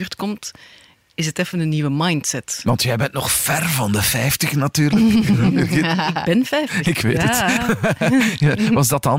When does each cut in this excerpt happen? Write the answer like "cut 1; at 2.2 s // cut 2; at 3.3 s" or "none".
none